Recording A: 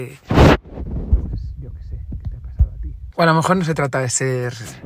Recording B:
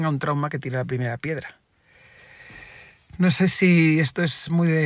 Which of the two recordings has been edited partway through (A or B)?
A